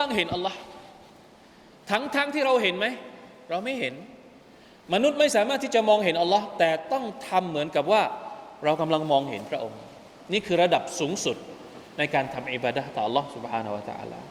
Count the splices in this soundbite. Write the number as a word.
zero